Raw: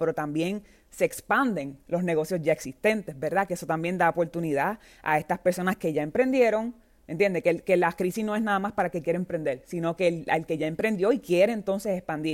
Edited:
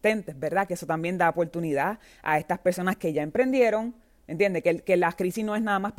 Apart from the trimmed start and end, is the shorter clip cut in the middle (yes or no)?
no